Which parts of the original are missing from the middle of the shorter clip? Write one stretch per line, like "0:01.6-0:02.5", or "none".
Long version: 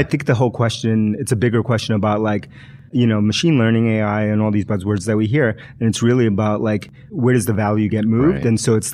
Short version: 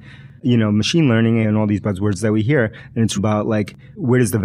0:03.9-0:04.3
0:06.0-0:06.3

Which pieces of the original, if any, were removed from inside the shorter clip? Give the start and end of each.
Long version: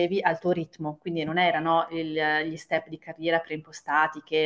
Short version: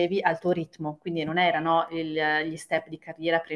none

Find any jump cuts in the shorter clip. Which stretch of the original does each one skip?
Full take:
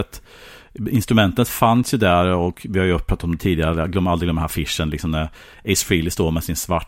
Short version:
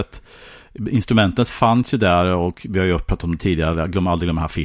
none

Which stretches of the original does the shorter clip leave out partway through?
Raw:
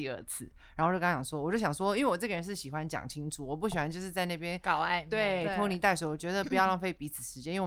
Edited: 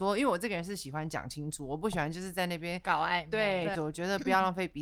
0:05.5-0:06.0

